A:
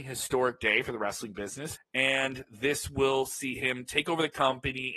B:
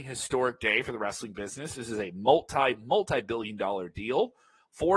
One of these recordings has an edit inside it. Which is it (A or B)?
A